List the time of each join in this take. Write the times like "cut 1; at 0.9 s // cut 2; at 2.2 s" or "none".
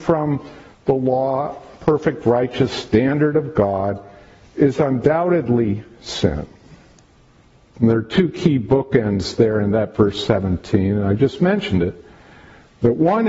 cut 1; at 7.7 s